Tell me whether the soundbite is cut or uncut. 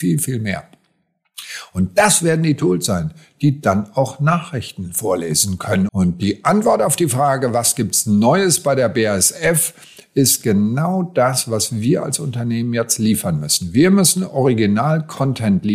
cut